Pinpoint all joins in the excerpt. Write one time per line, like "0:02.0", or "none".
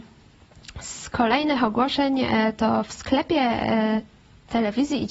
none